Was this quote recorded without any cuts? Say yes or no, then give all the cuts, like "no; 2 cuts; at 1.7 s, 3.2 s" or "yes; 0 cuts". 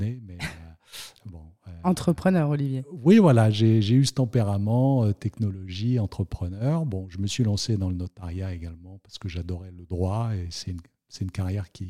yes; 0 cuts